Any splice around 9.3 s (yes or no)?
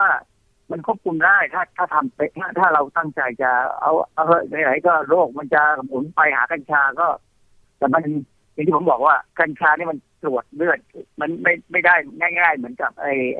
yes